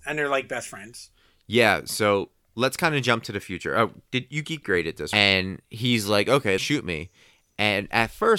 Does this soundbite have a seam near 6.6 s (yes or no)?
yes